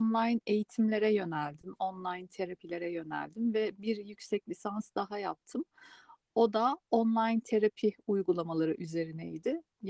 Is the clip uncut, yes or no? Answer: yes